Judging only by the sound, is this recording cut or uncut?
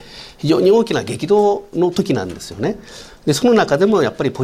uncut